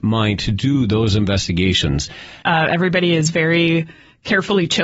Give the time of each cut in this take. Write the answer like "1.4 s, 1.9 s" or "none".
2.4 s